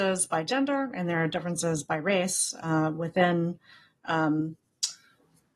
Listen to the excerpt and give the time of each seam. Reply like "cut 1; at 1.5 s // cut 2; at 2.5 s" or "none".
none